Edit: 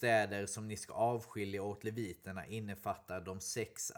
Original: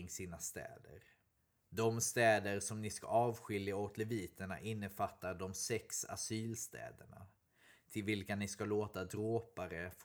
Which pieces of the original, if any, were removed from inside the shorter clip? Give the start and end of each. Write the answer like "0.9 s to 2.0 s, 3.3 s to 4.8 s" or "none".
none